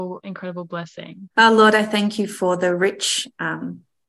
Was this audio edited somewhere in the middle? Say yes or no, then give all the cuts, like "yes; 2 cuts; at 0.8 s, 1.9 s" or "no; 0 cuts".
yes; 1 cut; at 1.3 s